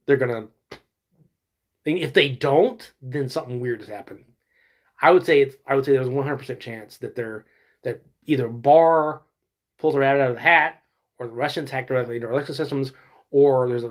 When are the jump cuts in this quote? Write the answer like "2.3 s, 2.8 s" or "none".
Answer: none